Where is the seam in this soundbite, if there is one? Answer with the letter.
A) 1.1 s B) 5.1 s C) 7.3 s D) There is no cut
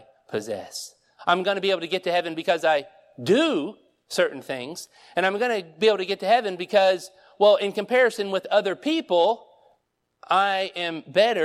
A